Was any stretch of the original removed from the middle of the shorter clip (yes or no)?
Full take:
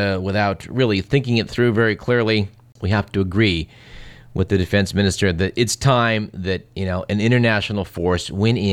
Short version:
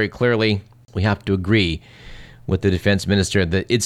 no